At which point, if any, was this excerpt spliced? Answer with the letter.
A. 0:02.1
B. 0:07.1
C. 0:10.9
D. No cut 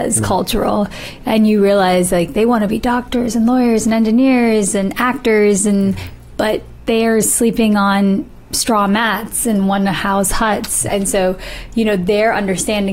C